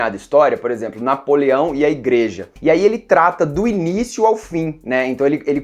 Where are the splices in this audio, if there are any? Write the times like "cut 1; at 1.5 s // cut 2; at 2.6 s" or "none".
cut 1; at 2.6 s